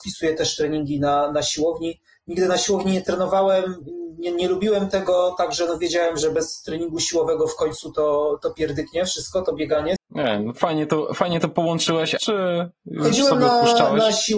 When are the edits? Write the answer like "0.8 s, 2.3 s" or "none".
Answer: 10.0 s, 12.2 s

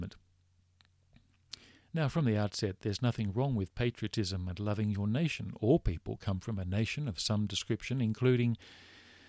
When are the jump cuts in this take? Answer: none

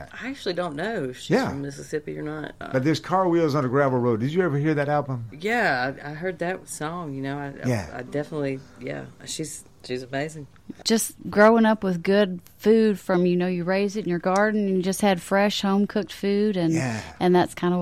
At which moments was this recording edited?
2.6 s, 10.8 s

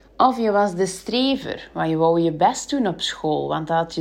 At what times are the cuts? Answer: none

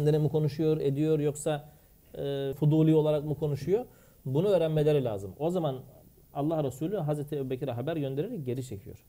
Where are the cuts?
2.5 s

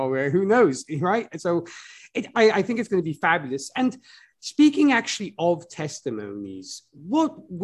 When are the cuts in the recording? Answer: none

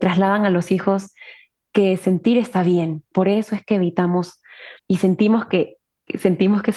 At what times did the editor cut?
3.1 s, 4.8 s

